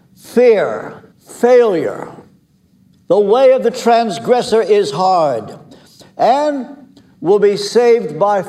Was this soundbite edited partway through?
yes; 1 cut; at 1.1 s

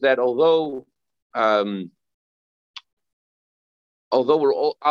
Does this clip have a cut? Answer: no; 0 cuts

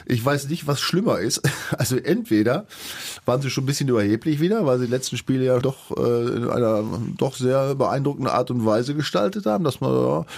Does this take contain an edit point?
yes; 1 cut; at 5.6 s

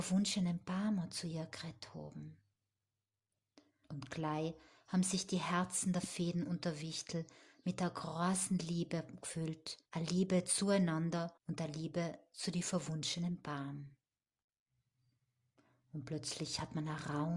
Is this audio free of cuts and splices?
no; 3 cuts; at 3.8 s, 9.8 s, 11.4 s

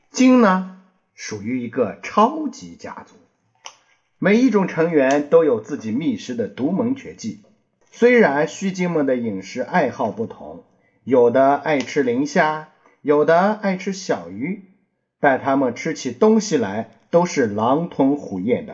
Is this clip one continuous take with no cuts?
no; 1 cut; at 7.8 s

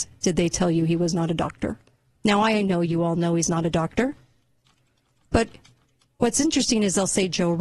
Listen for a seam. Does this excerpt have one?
no; 0 cuts

